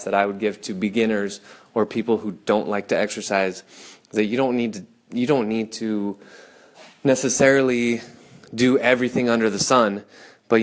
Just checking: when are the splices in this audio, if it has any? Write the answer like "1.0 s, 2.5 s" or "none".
none

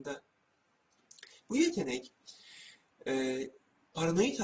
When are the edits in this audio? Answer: 1.4 s

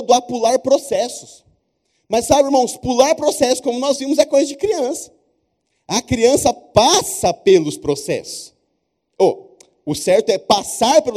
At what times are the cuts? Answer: none

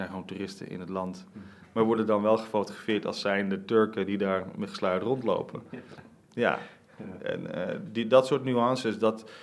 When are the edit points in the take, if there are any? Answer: none

